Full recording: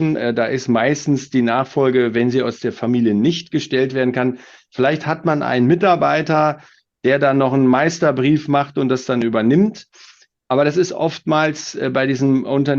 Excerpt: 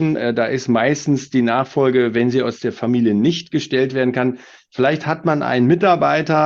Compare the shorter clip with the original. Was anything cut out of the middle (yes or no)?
no